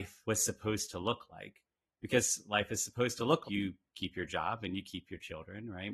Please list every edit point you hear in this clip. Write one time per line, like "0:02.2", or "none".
0:03.4